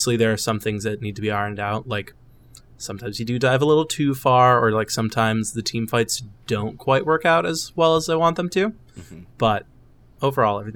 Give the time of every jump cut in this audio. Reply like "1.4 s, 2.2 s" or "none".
none